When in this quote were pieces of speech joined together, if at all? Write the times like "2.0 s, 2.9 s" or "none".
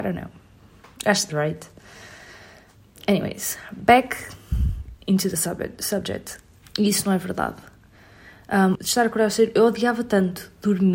1.3 s, 6.6 s, 8.7 s